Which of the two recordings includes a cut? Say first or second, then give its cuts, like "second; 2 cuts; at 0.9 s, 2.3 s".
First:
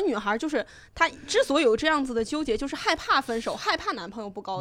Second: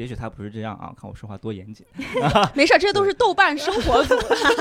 second; 1 cut; at 2.3 s